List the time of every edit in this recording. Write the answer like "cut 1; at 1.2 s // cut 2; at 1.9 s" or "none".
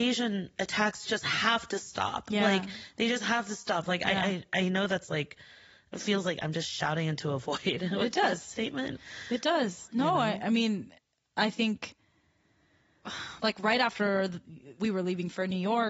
cut 1; at 14.8 s

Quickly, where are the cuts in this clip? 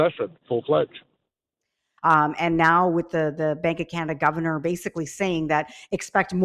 cut 1; at 2.0 s

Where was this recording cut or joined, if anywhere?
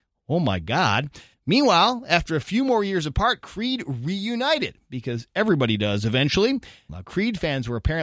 cut 1; at 1.3 s // cut 2; at 6.9 s

